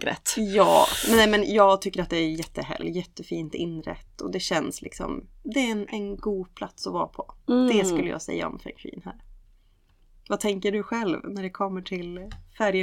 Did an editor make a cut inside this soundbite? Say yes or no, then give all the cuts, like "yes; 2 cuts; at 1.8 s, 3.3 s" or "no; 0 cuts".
yes; 1 cut; at 2.8 s